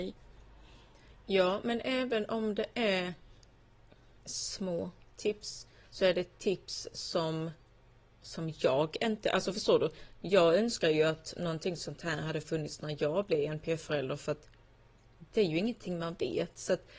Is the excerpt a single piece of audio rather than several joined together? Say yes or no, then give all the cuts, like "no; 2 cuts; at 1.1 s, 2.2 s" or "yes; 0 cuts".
yes; 0 cuts